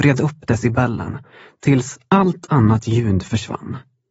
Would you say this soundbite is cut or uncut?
uncut